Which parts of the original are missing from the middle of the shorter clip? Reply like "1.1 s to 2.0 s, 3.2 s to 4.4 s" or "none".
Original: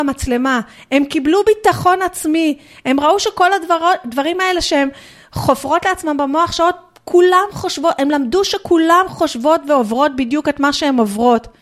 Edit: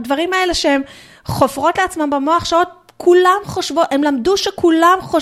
none

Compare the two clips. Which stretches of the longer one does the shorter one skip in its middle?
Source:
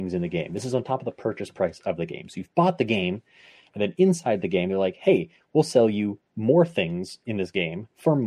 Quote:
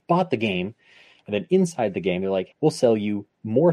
5.0 s to 5.4 s

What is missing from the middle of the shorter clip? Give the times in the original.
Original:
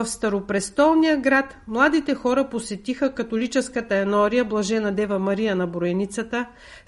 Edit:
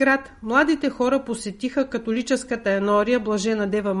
none

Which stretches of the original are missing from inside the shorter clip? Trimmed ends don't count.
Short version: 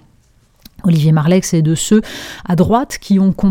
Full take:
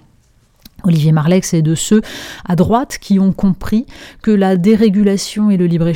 none

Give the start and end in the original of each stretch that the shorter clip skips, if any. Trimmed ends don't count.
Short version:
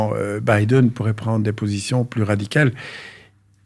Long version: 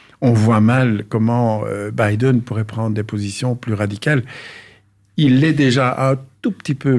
none

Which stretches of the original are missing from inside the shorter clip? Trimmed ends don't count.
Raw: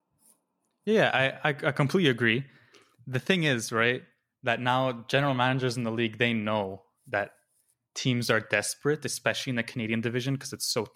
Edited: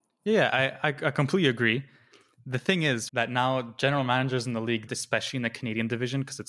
3.7 s to 4.4 s, 6.2 s to 9.0 s

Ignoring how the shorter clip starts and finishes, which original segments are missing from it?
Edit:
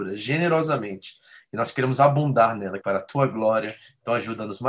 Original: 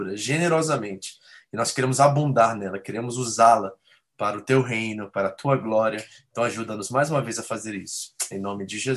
2.8 s to 5.1 s

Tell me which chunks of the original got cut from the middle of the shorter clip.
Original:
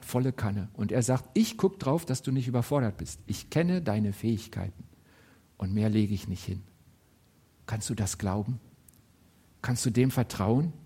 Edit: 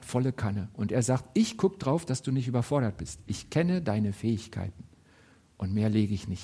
none

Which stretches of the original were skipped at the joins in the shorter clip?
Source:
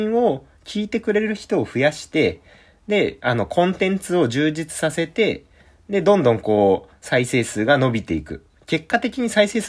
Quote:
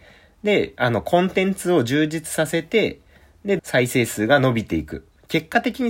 6.0 s to 7.0 s

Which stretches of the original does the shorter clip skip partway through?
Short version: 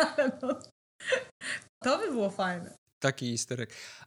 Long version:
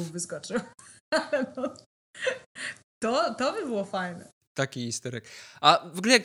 3.0 s to 3.4 s

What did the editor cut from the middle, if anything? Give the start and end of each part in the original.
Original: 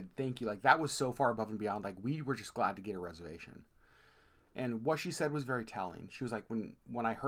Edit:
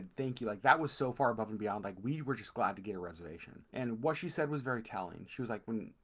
3.7 s to 4.5 s

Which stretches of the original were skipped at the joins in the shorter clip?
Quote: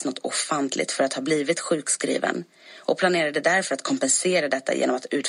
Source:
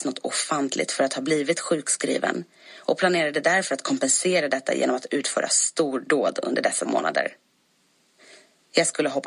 none

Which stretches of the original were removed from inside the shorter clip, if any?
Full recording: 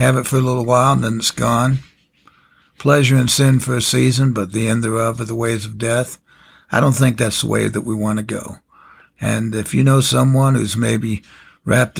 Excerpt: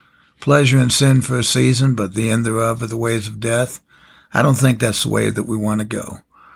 none

